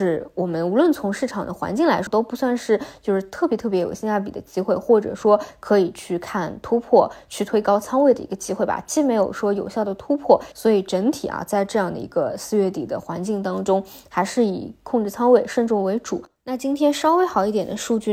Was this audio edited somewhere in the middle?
yes; 2 cuts; at 2.1 s, 10.5 s

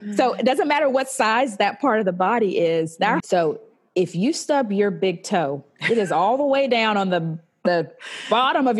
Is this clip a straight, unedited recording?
no; 1 cut; at 3.2 s

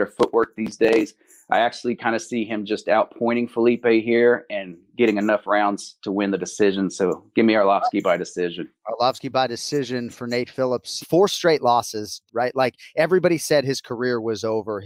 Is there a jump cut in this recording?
yes; 2 cuts; at 11.0 s, 12.3 s

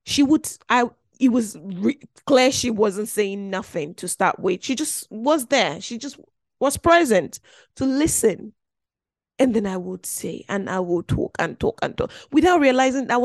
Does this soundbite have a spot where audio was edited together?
no; 0 cuts

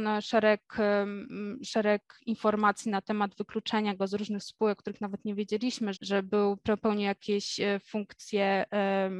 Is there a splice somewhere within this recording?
yes; 1 cut; at 5.9 s

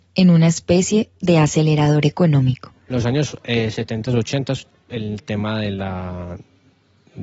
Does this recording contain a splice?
yes; 1 cut; at 2.9 s

